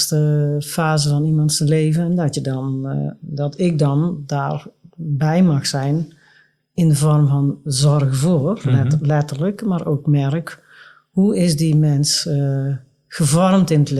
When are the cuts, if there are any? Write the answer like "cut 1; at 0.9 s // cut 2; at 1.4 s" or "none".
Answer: none